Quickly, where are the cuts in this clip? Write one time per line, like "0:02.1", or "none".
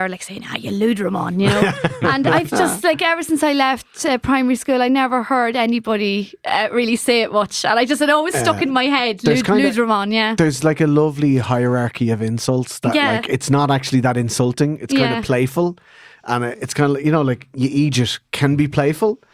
none